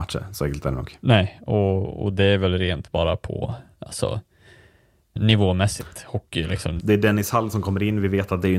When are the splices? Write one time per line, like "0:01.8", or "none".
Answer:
0:05.2
0:06.8